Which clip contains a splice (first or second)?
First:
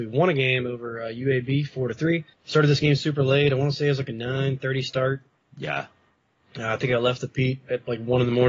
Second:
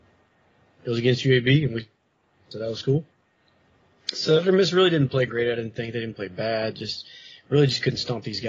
first